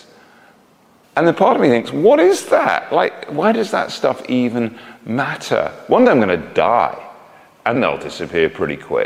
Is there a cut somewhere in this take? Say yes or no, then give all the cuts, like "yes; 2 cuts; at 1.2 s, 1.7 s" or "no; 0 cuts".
yes; 2 cuts; at 1.0 s, 7.7 s